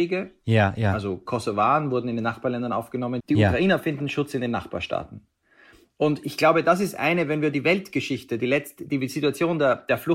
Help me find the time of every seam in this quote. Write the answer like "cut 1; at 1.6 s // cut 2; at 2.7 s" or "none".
cut 1; at 3.2 s

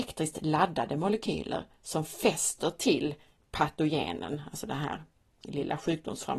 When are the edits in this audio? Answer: none

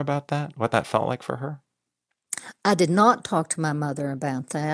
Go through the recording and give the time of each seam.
none

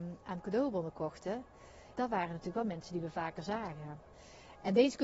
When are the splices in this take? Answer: cut 1; at 2.0 s

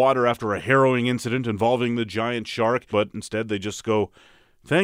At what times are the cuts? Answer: cut 1; at 2.9 s

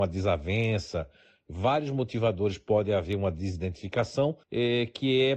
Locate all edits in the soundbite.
cut 1; at 4.4 s

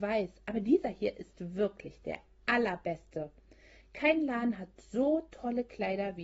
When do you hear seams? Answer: none

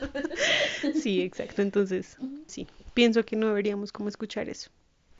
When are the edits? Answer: cut 1; at 2.5 s

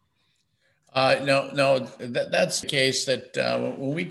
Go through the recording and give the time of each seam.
cut 1; at 2.6 s

